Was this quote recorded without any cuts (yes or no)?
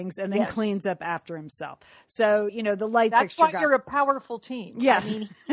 yes